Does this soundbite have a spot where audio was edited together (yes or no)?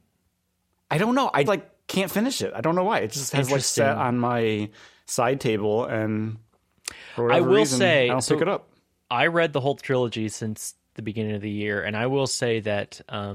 yes